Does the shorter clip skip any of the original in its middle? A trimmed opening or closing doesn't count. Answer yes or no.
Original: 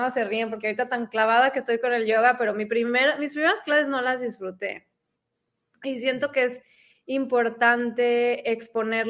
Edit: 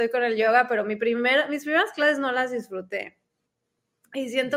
no